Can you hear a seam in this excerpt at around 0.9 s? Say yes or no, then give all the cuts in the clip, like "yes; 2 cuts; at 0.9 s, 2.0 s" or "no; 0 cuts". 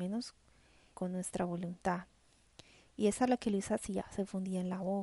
yes; 1 cut; at 0.9 s